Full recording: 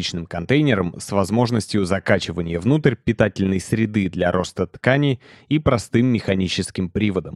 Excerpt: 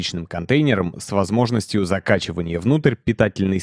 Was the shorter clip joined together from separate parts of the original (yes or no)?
no